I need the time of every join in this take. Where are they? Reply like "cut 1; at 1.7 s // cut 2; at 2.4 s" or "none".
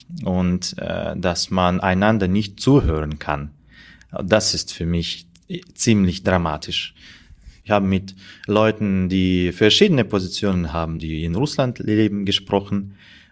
cut 1; at 7.6 s // cut 2; at 11.0 s